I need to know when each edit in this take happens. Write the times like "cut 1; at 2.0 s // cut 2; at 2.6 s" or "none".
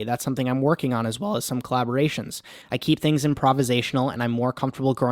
cut 1; at 2.6 s